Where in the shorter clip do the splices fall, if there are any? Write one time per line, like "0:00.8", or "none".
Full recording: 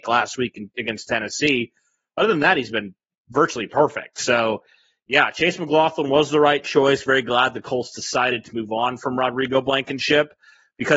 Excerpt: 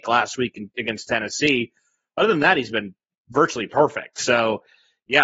none